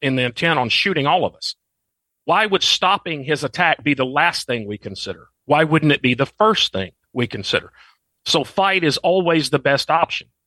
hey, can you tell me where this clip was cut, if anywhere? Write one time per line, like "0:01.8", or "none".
none